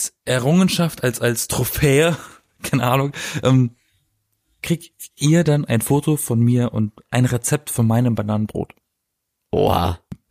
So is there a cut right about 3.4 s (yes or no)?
no